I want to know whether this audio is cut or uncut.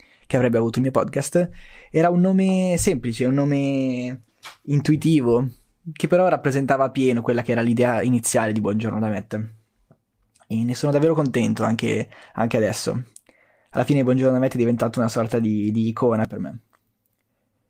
uncut